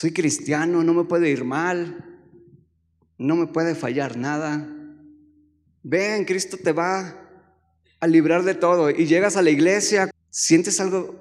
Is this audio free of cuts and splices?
no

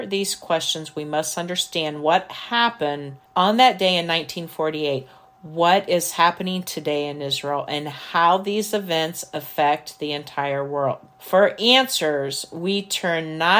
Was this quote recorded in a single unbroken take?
yes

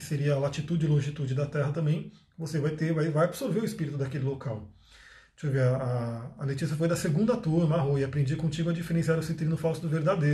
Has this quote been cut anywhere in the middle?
no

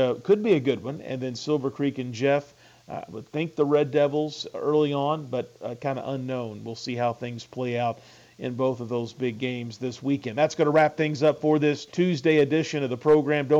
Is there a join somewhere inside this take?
yes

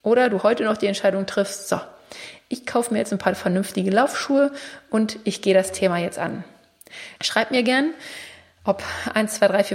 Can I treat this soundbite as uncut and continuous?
no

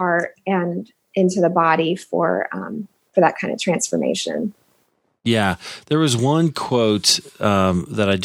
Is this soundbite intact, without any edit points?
yes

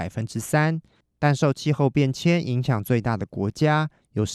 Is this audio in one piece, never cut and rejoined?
yes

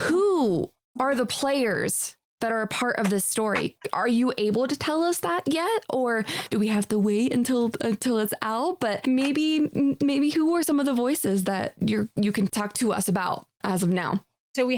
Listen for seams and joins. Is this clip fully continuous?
yes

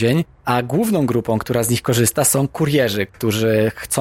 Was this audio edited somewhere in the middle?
yes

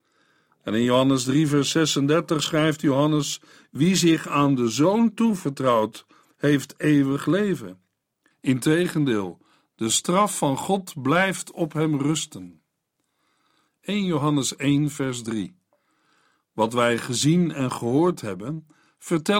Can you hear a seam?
yes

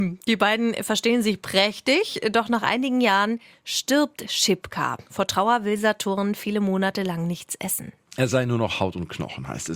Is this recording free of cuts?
yes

